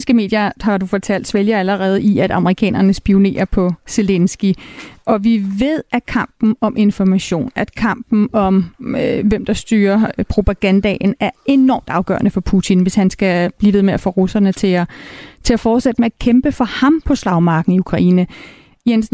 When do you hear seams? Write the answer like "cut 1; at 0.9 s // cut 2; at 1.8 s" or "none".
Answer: none